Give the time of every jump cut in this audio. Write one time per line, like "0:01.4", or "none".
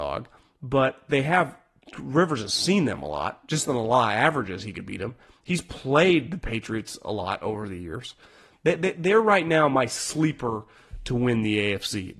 0:08.5